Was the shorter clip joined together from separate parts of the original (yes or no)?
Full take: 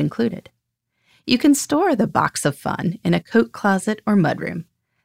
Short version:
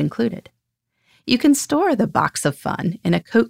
no